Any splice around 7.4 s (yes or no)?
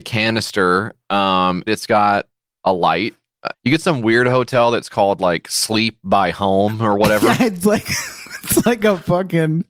no